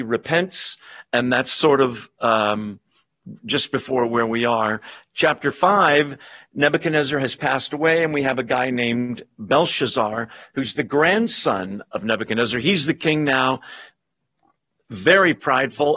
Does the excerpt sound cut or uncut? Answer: uncut